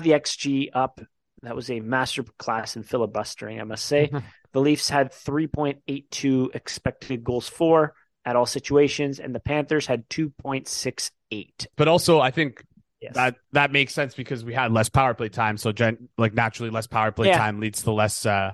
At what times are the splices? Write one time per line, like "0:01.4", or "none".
0:11.7